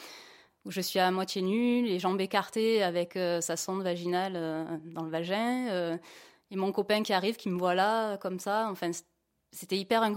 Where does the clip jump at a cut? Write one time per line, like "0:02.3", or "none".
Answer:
none

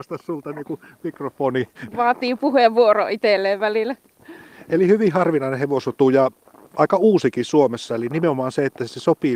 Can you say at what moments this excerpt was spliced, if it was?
0:01.9
0:07.9

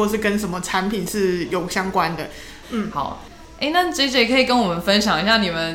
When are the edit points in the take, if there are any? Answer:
0:02.6

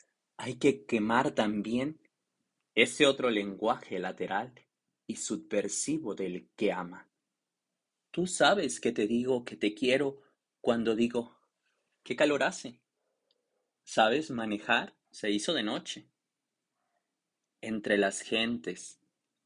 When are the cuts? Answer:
0:13.8
0:15.0

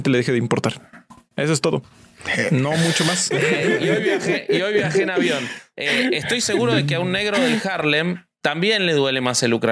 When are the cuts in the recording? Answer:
0:03.3

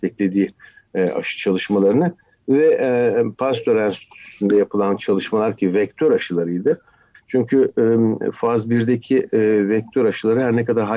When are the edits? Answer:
0:07.1

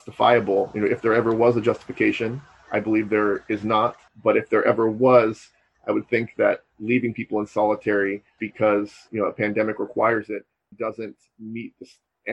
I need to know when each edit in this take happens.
0:08.4
0:10.7

